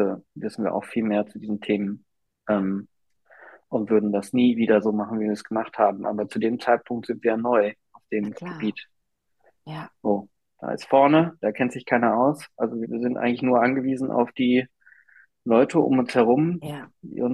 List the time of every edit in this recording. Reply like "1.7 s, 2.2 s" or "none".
12.8 s